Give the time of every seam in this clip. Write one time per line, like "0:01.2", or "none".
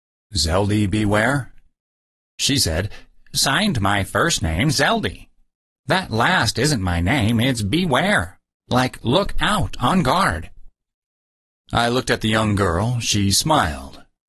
0:03.3